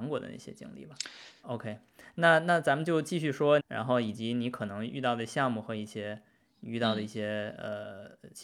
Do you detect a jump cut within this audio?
yes; 2 cuts; at 1.4 s, 3.6 s

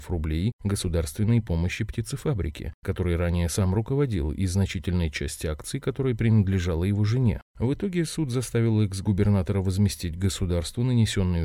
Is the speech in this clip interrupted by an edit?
no; 0 cuts

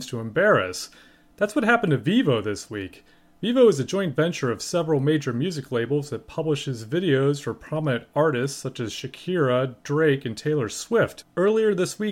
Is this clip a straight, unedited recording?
yes; 0 cuts

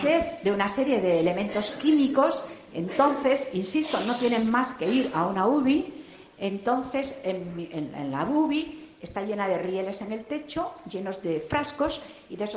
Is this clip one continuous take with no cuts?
yes; 0 cuts

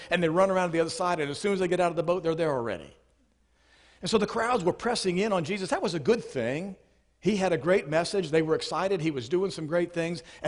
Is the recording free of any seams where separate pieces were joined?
yes; 0 cuts

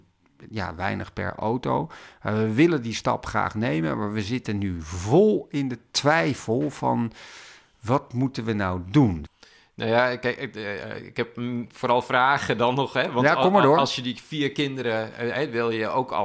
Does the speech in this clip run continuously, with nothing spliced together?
yes; 0 cuts

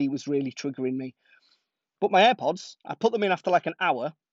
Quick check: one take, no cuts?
yes; 0 cuts

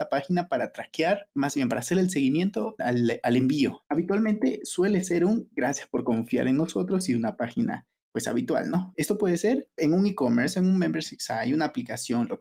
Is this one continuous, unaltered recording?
no; 3 cuts; at 2.8 s, 3.8 s, 8.9 s

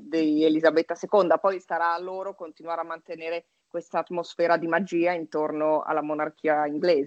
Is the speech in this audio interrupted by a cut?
no; 0 cuts

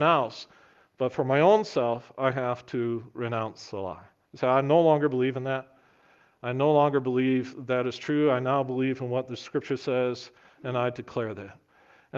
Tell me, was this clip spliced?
no; 0 cuts

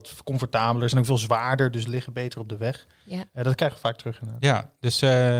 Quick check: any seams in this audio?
no; 0 cuts

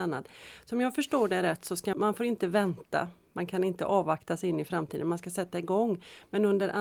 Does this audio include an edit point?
yes; 1 cut; at 1.9 s

